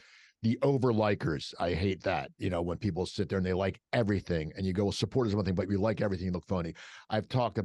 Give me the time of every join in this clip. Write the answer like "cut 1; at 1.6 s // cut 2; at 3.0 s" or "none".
none